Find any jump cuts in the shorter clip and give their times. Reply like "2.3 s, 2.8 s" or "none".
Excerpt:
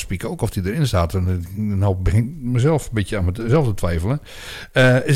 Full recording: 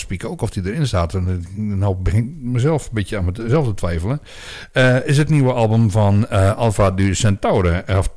none